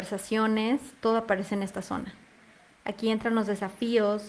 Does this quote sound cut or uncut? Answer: cut